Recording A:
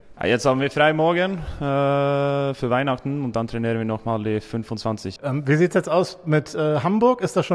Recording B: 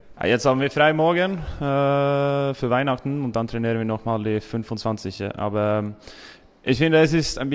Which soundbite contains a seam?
A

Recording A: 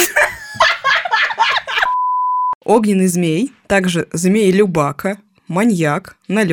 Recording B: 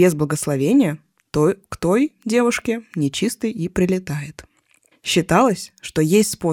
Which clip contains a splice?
B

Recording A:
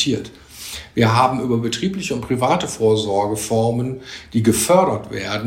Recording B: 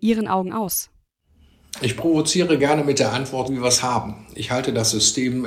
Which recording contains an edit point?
B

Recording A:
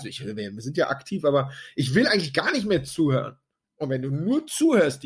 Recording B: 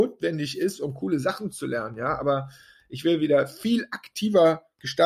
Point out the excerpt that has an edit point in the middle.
A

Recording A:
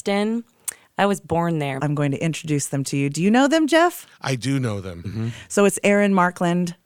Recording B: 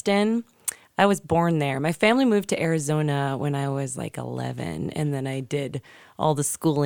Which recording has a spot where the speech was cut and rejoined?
A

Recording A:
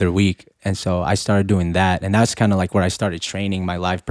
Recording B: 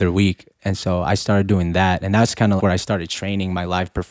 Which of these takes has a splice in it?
B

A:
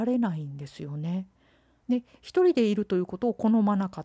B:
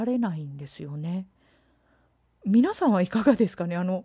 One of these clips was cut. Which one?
A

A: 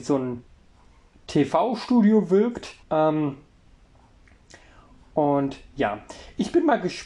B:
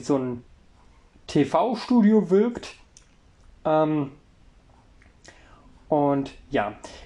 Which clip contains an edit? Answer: A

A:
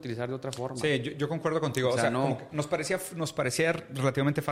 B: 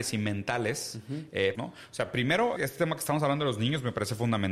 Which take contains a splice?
B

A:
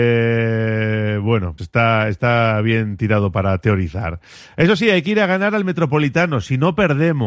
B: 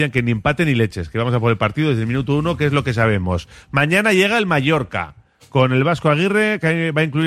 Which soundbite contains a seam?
A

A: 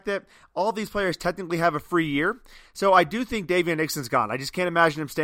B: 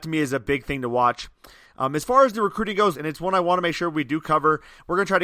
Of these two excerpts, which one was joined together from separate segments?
B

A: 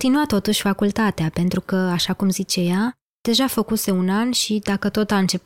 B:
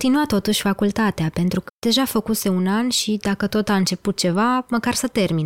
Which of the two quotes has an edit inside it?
B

